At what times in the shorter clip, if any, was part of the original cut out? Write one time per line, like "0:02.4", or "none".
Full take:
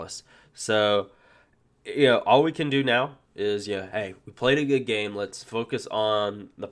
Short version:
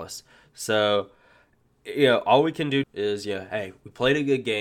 0:02.8